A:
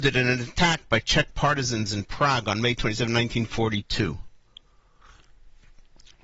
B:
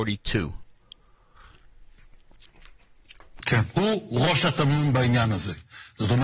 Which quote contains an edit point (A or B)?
B